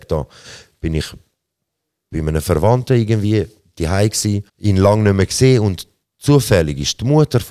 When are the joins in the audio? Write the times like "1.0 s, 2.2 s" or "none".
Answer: 4.5 s